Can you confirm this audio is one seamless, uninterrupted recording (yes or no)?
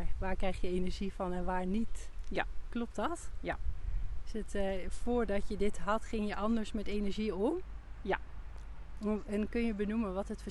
yes